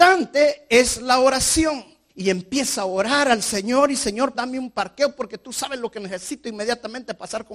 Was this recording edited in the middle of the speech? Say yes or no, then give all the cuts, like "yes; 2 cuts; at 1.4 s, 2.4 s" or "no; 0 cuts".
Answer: yes; 2 cuts; at 2.1 s, 4.3 s